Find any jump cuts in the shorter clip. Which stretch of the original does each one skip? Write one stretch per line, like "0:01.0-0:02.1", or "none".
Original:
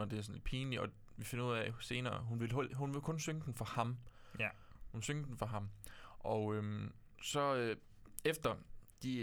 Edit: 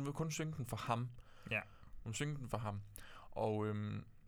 none